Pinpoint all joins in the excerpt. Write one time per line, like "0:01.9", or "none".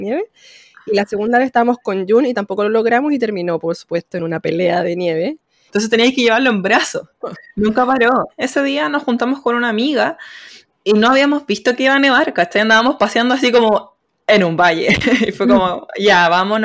0:05.7
0:07.2
0:08.3

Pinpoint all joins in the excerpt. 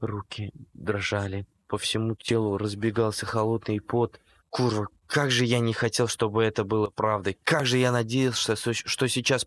0:04.4

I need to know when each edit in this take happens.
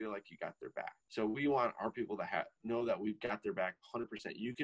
0:01.0

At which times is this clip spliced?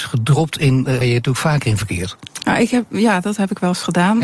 0:01.0

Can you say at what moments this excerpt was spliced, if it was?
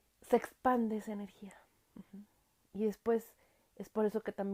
none

